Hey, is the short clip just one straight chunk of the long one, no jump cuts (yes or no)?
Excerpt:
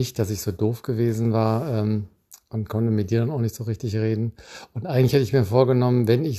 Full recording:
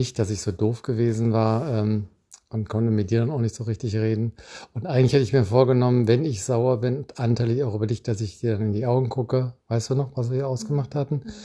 yes